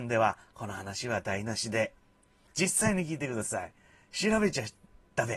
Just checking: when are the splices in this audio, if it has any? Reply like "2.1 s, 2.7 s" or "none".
2.5 s